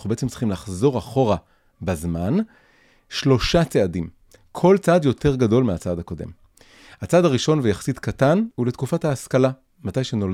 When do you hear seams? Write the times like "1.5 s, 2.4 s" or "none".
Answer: 8.5 s